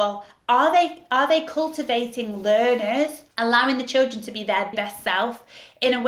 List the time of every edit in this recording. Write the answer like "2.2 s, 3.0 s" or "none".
3.3 s, 4.7 s